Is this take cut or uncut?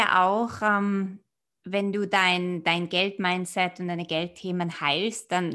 uncut